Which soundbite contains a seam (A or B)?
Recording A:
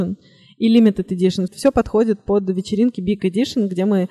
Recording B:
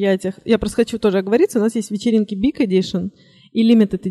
A